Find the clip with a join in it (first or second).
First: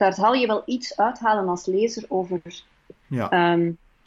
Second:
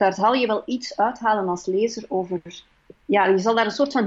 first